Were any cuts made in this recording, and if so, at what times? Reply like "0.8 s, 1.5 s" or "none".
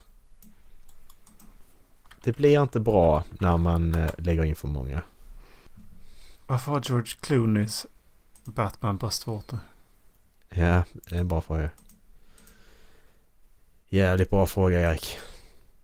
6.3 s